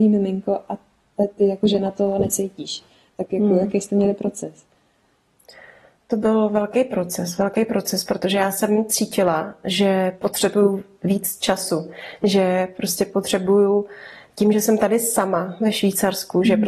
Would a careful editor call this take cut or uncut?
uncut